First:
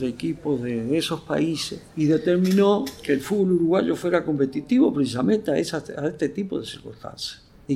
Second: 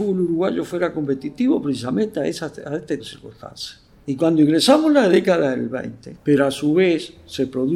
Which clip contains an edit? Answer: second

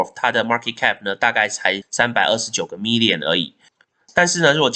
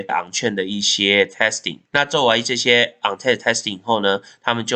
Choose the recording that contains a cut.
second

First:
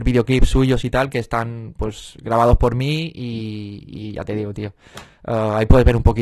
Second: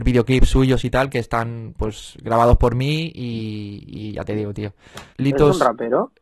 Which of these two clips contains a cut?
second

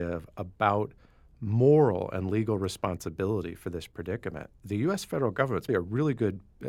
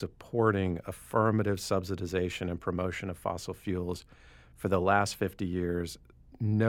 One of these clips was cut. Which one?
first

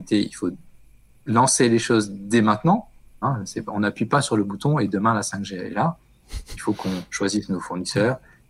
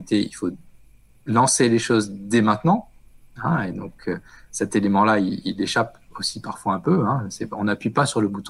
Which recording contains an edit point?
first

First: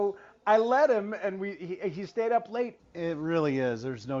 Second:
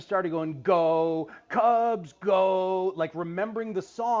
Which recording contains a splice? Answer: first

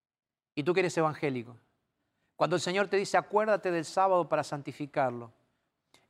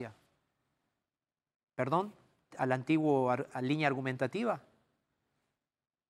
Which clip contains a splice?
second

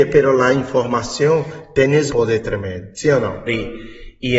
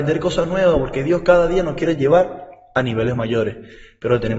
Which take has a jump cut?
first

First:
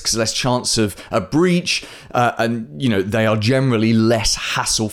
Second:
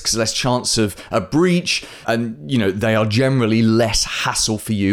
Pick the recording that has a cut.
second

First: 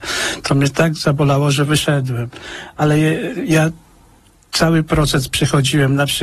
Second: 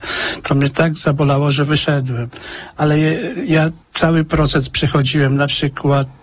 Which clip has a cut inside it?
second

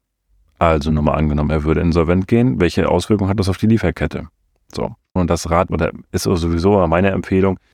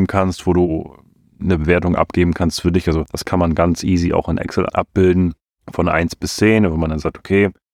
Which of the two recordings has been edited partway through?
first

